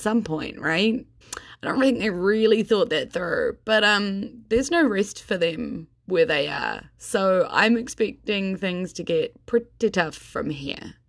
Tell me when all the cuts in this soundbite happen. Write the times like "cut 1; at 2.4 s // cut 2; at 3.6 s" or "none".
cut 1; at 1.2 s